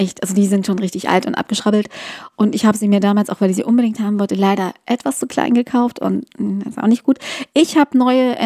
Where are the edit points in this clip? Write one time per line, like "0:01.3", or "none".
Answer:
none

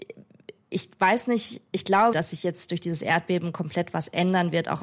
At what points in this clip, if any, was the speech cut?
0:02.1

